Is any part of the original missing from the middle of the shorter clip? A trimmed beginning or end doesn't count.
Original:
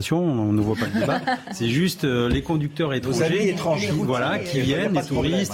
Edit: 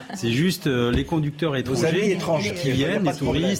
yes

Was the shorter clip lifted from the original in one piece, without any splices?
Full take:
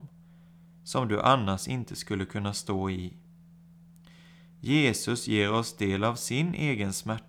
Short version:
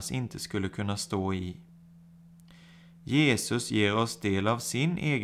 yes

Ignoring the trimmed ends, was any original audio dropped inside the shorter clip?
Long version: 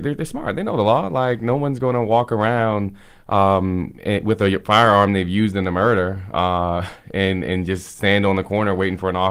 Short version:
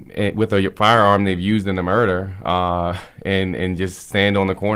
no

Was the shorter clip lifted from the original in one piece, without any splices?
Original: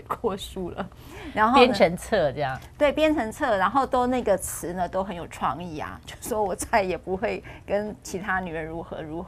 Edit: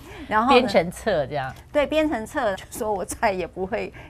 no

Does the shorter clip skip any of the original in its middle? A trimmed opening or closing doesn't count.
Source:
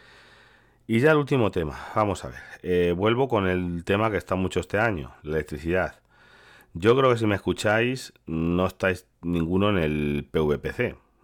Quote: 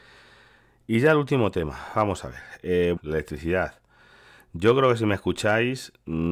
yes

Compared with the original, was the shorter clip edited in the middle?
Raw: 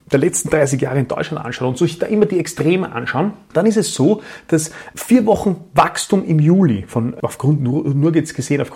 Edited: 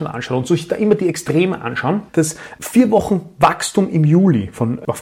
yes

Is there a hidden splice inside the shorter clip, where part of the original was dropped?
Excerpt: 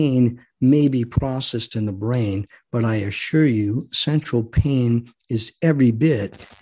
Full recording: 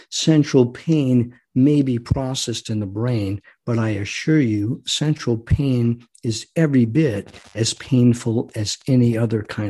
no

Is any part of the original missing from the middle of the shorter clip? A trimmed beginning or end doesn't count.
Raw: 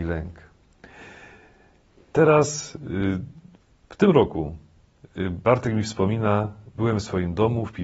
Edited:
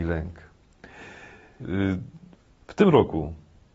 yes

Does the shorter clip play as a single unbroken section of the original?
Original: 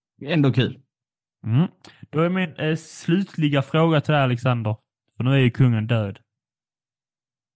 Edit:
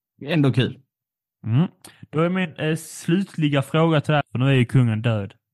no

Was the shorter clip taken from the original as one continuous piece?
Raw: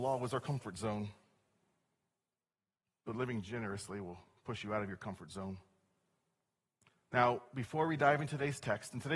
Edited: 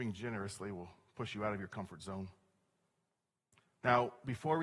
yes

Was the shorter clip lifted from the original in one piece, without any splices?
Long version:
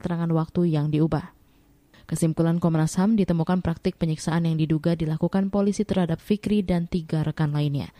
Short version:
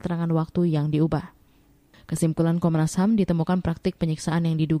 yes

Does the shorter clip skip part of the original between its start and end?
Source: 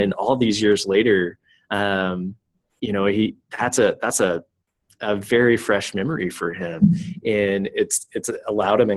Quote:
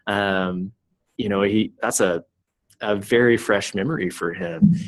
yes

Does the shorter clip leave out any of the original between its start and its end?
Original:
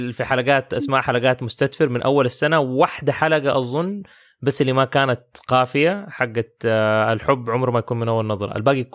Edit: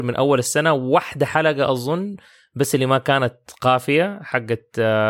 no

